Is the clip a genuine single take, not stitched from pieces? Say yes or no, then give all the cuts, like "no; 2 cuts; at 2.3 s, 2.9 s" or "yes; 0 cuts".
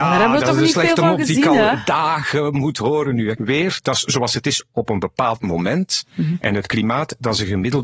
no; 1 cut; at 3.4 s